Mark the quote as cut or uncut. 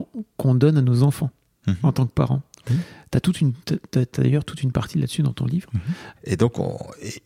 cut